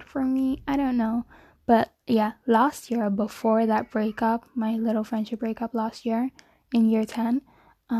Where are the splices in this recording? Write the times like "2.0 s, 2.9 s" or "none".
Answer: none